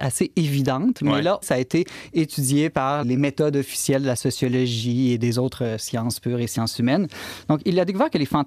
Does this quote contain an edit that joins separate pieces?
yes; 2 cuts; at 1.4 s, 3.0 s

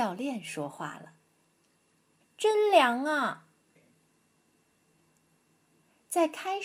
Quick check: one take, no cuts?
no; 2 cuts; at 2.2 s, 3.7 s

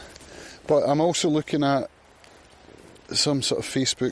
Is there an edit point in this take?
no; 0 cuts

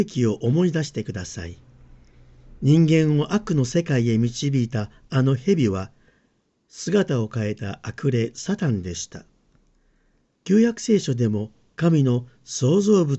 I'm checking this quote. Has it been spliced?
yes; 2 cuts; at 10.3 s, 11.7 s

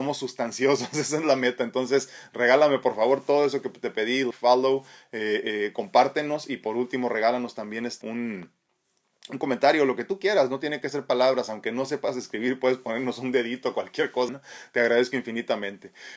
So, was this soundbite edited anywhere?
yes; 3 cuts; at 4.3 s, 8.0 s, 14.3 s

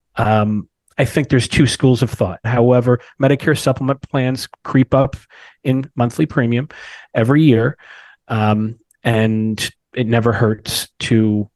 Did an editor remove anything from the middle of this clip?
yes; 1 cut; at 2.4 s

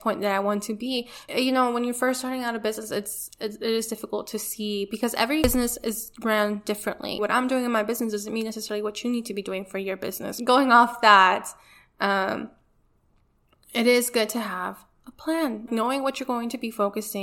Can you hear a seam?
yes; 3 cuts; at 1.3 s, 7.2 s, 15.7 s

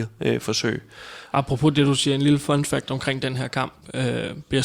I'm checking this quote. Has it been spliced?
yes; 1 cut; at 1.3 s

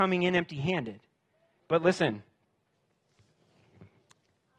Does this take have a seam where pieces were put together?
yes; 1 cut; at 1.6 s

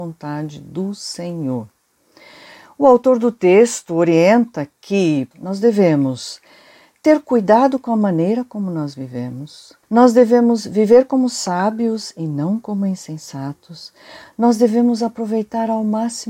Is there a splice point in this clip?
yes; 2 cuts; at 5.3 s, 9.8 s

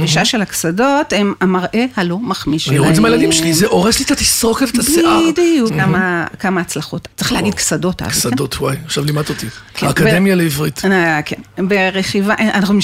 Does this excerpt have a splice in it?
yes; 2 cuts; at 5.7 s, 7.0 s

